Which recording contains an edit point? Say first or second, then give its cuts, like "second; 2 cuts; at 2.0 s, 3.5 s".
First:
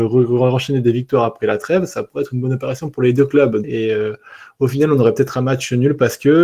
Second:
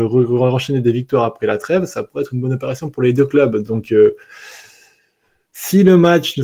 first; 1 cut; at 3.6 s